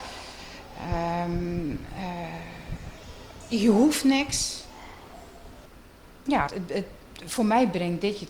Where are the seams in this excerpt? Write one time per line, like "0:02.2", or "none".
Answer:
0:06.5